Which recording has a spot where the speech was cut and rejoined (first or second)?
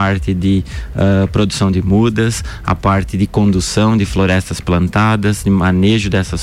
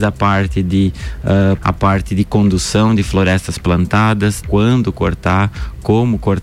second